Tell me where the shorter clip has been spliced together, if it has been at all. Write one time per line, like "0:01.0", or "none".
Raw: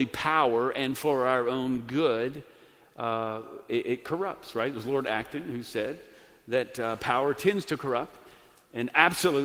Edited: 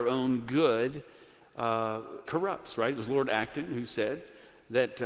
0:02.3